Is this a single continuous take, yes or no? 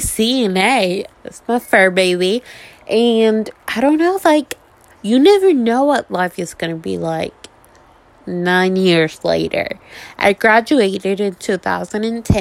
no